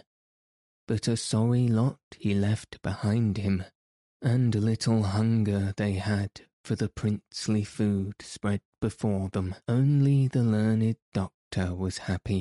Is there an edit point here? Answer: yes; 1 cut; at 9.6 s

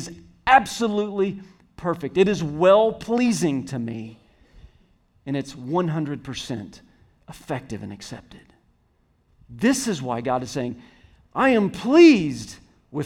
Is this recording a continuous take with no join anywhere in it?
yes; 0 cuts

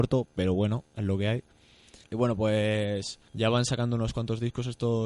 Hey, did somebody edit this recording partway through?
yes; 2 cuts; at 2.0 s, 3.3 s

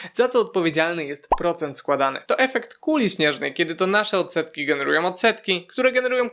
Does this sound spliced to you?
no; 0 cuts

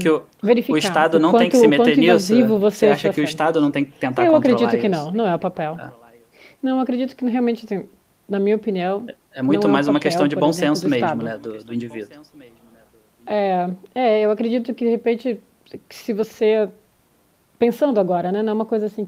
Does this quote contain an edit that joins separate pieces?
no; 0 cuts

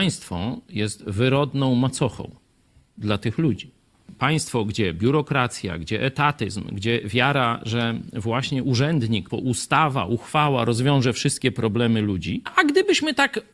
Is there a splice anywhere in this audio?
yes; 2 cuts; at 9.3 s, 12.5 s

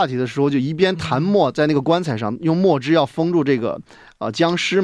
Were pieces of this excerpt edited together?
no; 0 cuts

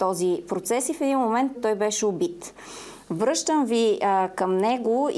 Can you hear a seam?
yes; 1 cut; at 1.5 s

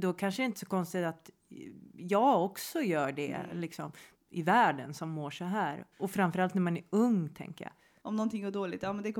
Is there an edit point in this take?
yes; 3 cuts; at 4.1 s, 5.9 s, 8.0 s

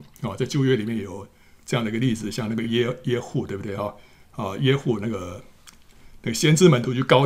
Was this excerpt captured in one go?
yes; 0 cuts

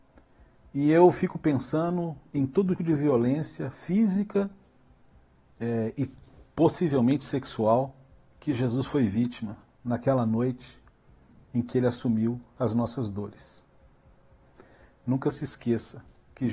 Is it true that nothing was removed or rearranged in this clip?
no; 1 cut; at 2.8 s

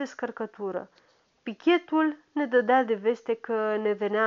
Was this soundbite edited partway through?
no; 0 cuts

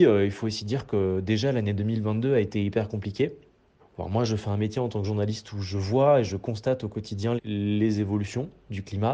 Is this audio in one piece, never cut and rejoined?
no; 2 cuts; at 3.8 s, 7.4 s

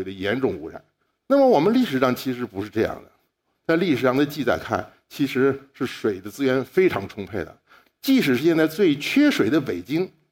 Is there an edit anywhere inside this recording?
yes; 2 cuts; at 1.1 s, 3.5 s

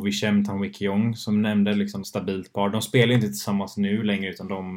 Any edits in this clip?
yes; 1 cut; at 2.0 s

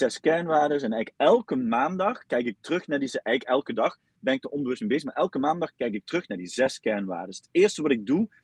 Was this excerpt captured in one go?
yes; 0 cuts

